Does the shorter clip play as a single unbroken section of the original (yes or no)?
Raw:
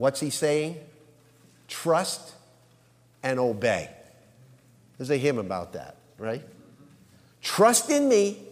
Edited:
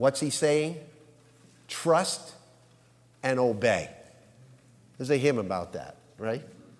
yes